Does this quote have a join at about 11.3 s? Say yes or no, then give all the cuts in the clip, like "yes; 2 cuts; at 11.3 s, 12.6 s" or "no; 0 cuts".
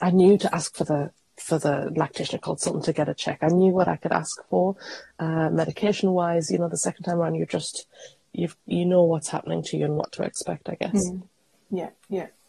no; 0 cuts